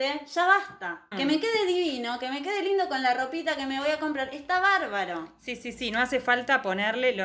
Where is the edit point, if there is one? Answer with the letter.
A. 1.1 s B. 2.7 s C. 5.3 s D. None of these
A